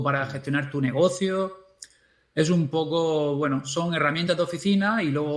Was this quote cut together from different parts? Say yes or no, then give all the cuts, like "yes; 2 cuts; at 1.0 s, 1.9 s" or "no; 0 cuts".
no; 0 cuts